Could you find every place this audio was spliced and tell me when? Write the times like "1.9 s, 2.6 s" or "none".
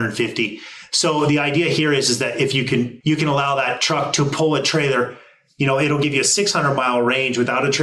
3.0 s